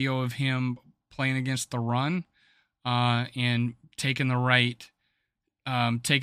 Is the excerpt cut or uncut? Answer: uncut